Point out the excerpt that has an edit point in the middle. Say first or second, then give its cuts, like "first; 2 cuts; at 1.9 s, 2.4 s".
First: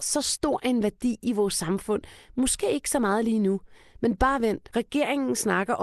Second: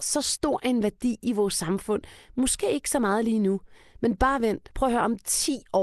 first; 1 cut; at 4.7 s